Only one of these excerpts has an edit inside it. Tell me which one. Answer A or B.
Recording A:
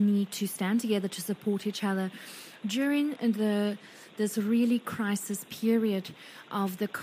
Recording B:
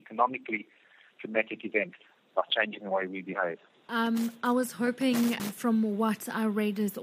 B